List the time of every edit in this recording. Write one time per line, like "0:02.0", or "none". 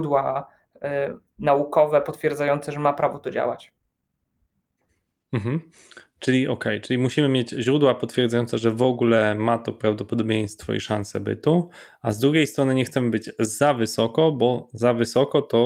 none